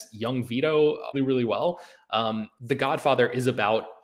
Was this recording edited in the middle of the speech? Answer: yes; 2 cuts; at 1.1 s, 2.6 s

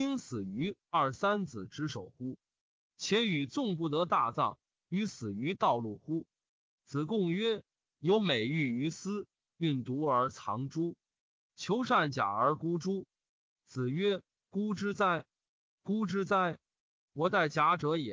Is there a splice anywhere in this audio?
no; 0 cuts

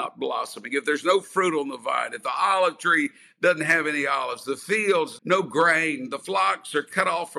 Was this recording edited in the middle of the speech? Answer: yes; 1 cut; at 5.2 s

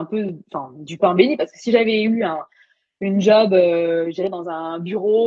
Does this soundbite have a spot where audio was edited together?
no; 0 cuts

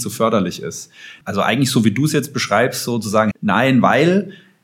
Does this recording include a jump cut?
yes; 2 cuts; at 1.2 s, 3.3 s

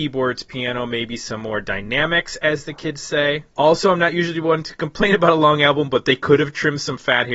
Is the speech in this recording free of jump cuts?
no; 1 cut; at 3.5 s

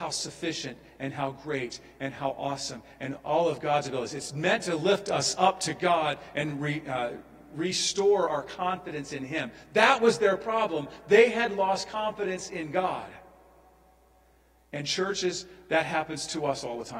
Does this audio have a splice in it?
no; 0 cuts

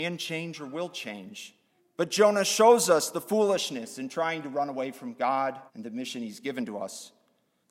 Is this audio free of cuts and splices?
no; 2 cuts; at 1.8 s, 5.7 s

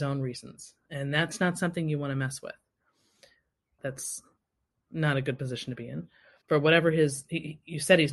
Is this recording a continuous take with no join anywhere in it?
no; 2 cuts; at 3.8 s, 6.4 s

